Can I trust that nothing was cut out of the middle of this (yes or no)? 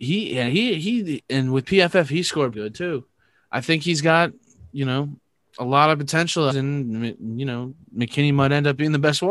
no